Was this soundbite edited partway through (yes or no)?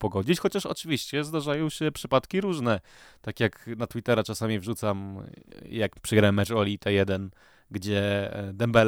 no